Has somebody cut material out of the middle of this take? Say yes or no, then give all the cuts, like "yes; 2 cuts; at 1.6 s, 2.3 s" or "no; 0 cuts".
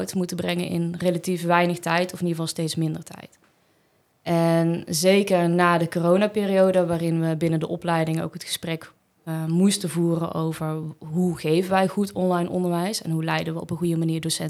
no; 0 cuts